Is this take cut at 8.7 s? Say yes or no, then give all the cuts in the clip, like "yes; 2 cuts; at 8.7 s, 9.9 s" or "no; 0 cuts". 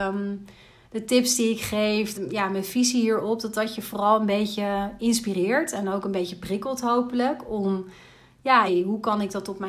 yes; 2 cuts; at 2.1 s, 8.7 s